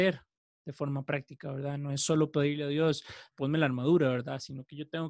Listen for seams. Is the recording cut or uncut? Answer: cut